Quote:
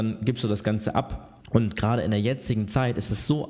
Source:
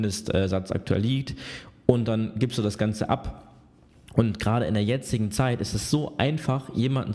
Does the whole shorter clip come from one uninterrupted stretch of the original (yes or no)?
no